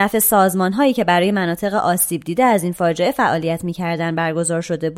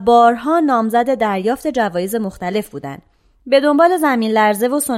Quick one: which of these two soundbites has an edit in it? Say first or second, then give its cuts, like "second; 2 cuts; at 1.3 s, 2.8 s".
second; 1 cut; at 3.4 s